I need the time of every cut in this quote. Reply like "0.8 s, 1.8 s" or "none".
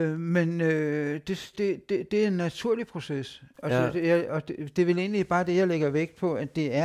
1.5 s